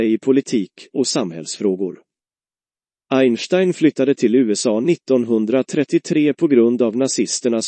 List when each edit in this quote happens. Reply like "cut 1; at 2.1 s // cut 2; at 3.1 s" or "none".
none